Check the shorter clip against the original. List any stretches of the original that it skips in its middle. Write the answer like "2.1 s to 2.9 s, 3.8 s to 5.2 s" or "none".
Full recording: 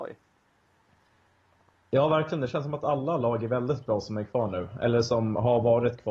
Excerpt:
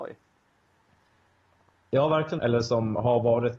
2.4 s to 4.8 s